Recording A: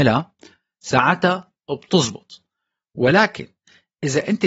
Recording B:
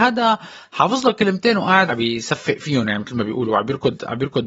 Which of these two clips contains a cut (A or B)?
B